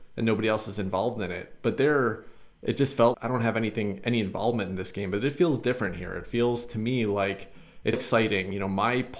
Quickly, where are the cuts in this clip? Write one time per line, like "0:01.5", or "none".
0:03.1
0:07.9